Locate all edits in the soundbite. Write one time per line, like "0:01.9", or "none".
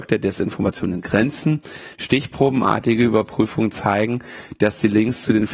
0:01.9